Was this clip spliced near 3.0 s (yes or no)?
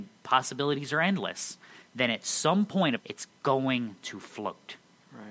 yes